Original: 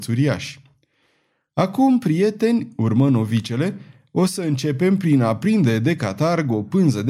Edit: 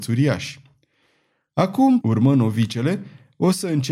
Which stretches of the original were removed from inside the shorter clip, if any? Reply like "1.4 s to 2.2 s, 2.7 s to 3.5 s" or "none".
2.0 s to 2.7 s